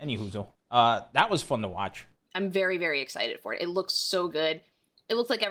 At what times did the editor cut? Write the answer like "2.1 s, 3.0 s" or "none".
2.3 s